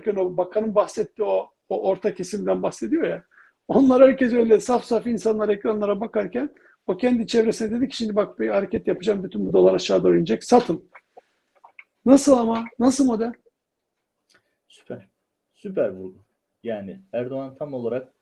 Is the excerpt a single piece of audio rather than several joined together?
yes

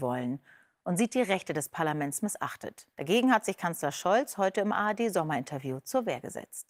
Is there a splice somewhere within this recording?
yes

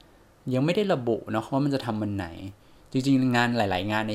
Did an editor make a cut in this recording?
no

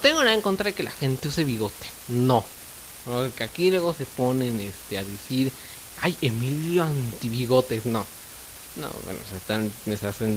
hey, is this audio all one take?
yes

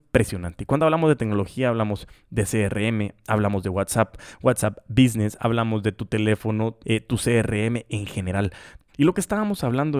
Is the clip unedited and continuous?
no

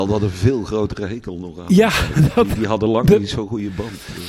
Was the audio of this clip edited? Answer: no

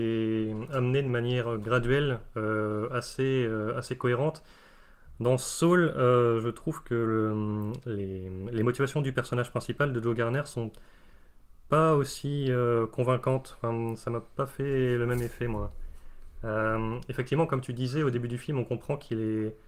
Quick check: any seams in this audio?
no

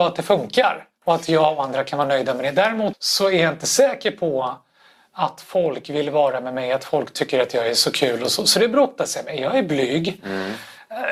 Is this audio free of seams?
no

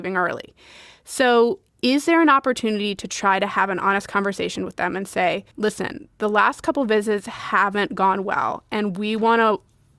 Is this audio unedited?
no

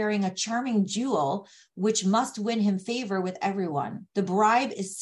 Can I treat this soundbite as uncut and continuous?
no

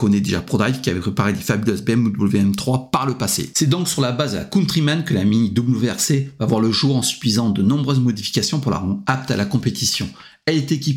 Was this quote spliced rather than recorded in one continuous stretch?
no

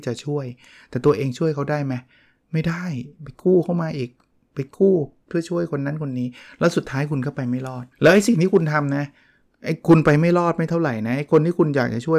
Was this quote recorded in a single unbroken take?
no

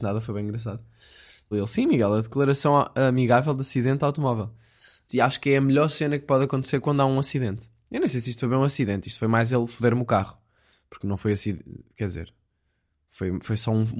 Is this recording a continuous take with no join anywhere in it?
no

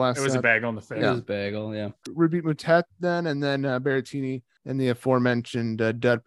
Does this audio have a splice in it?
no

